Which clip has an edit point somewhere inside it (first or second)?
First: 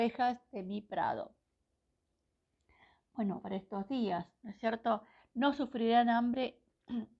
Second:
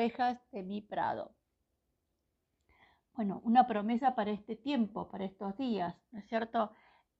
first